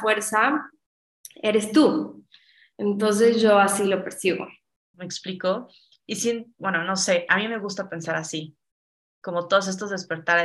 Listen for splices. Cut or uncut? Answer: cut